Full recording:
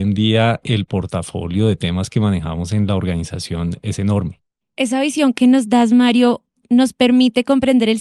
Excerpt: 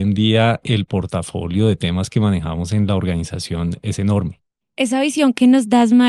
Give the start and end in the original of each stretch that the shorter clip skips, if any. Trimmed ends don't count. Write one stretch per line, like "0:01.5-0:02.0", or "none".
none